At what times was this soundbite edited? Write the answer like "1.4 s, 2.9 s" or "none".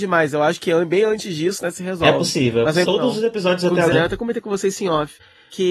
2.8 s, 3.9 s